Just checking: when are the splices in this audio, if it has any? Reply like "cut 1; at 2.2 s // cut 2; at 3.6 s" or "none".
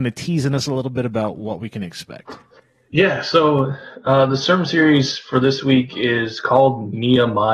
none